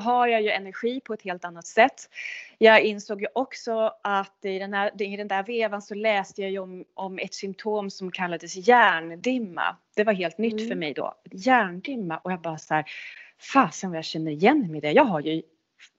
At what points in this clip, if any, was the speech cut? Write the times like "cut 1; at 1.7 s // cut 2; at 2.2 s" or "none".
none